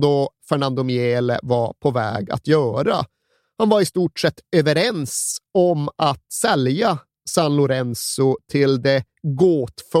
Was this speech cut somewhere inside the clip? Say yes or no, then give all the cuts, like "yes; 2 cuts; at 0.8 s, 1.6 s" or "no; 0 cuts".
no; 0 cuts